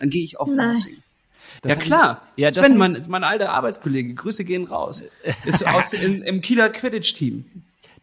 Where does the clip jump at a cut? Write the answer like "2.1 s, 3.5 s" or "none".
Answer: 1.6 s